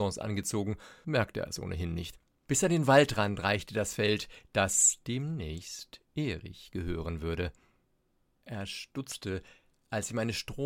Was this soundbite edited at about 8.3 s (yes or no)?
no